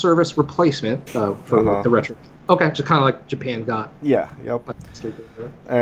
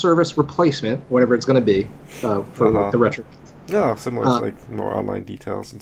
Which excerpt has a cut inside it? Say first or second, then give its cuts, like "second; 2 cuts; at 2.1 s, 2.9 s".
first; 2 cuts; at 1.1 s, 2.4 s